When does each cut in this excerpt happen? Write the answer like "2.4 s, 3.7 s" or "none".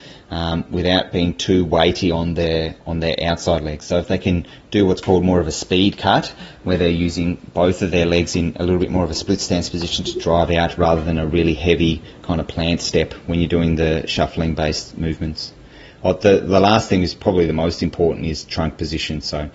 none